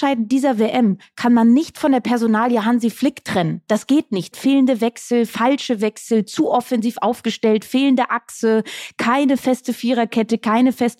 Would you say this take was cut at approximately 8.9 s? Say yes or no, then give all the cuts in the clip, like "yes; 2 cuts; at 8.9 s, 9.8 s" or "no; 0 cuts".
no; 1 cut; at 4.3 s